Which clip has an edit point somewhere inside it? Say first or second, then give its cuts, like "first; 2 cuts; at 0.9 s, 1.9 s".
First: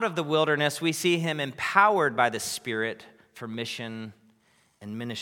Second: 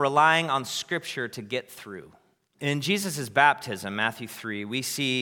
second; 1 cut; at 2.6 s